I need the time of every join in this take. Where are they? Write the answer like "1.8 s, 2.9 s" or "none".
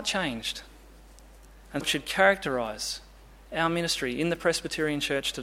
1.8 s